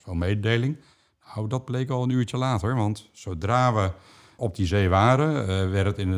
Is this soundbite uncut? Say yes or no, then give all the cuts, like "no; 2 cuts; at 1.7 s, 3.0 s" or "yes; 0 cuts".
no; 1 cut; at 4.4 s